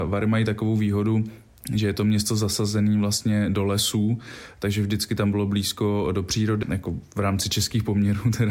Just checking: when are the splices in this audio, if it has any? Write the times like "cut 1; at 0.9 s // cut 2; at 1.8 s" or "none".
cut 1; at 6.6 s